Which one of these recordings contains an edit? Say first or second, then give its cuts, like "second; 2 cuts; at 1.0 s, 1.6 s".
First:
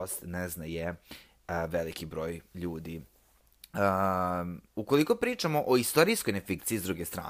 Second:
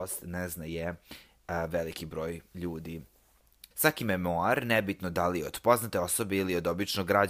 second; 1 cut; at 3.7 s